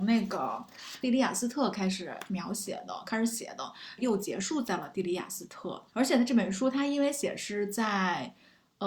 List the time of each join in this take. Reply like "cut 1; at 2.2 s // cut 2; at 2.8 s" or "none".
cut 1; at 4.0 s // cut 2; at 5.9 s